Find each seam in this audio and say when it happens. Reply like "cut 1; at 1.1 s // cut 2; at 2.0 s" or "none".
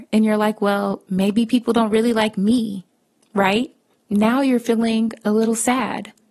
cut 1; at 3.9 s